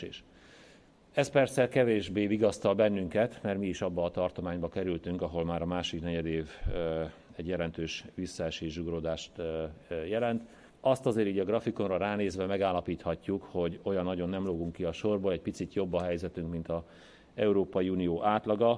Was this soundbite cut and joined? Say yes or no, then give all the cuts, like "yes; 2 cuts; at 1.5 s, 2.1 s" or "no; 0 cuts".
yes; 1 cut; at 10.7 s